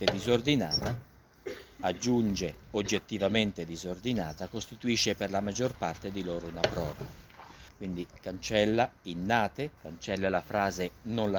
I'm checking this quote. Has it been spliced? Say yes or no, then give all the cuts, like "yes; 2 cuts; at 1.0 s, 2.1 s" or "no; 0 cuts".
yes; 2 cuts; at 7.7 s, 9.8 s